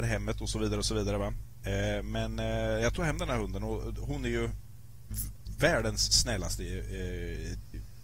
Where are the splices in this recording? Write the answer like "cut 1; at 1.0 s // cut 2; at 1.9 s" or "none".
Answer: none